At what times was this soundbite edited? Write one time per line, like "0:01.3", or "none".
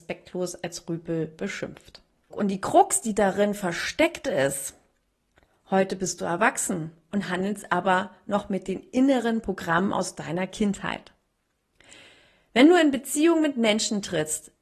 0:02.3